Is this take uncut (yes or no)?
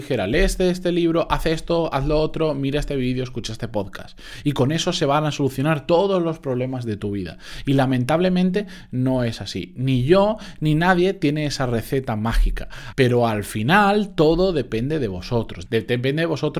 no